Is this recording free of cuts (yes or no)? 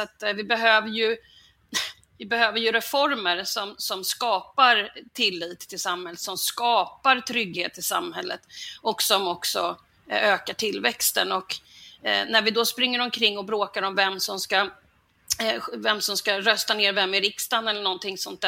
no